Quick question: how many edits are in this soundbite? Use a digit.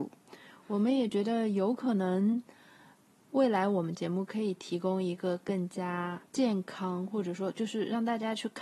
1